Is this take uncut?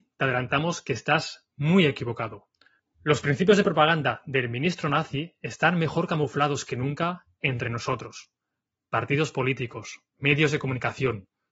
no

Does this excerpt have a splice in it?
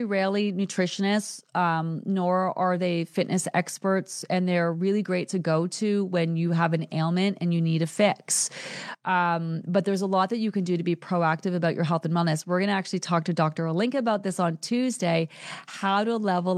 no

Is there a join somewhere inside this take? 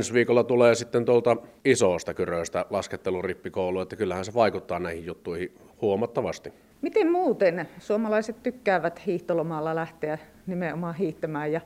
no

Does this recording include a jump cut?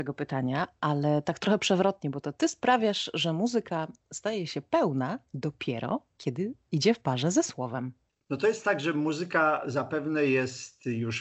no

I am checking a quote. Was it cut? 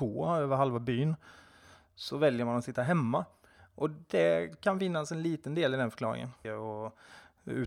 yes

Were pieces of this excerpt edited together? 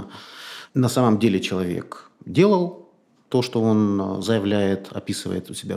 no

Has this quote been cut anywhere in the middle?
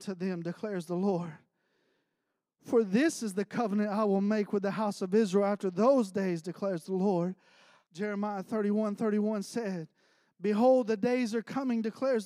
yes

